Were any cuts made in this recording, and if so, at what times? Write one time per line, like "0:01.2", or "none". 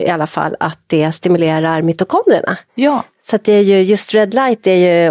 0:02.7